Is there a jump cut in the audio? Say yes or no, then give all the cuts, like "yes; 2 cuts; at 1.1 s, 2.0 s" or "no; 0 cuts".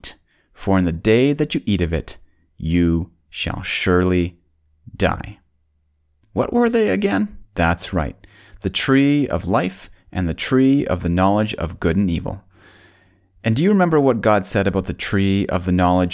yes; 2 cuts; at 6.2 s, 7.5 s